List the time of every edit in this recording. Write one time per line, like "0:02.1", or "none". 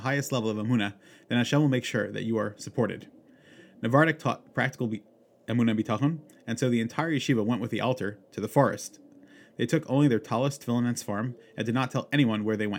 none